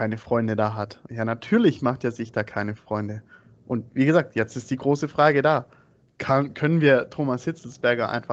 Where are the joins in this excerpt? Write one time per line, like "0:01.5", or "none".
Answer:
0:01.1